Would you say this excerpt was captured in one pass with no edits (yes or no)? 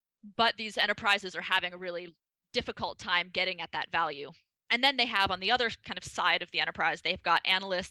no